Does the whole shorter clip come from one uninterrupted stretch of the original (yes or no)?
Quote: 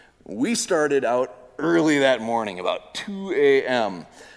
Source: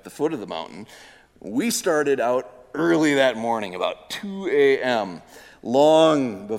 yes